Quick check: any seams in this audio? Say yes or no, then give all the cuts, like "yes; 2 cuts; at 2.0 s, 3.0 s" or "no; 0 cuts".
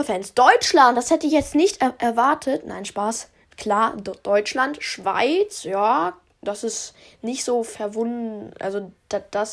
no; 0 cuts